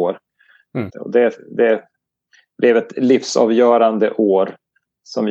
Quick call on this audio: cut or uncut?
cut